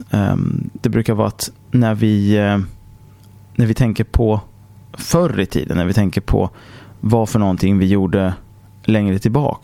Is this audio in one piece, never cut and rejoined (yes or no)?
yes